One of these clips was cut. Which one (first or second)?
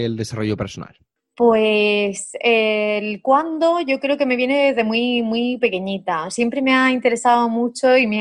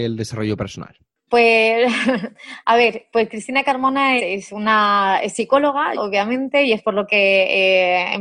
second